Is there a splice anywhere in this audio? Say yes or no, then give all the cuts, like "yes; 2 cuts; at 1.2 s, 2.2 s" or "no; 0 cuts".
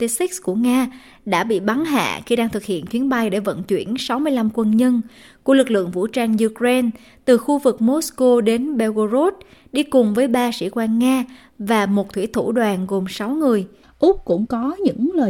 yes; 1 cut; at 13.8 s